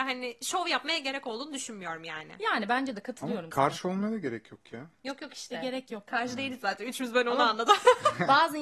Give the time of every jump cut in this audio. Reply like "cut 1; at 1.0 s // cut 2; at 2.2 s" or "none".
none